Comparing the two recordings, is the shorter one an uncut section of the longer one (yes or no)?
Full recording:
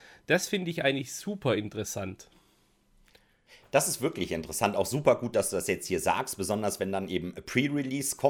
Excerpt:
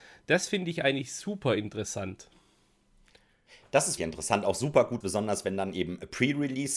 no